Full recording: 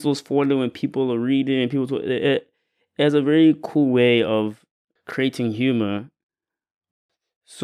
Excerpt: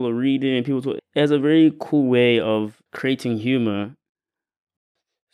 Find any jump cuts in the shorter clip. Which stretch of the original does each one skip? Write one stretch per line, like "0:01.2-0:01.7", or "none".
0:02.0-0:02.8
0:04.7-0:05.0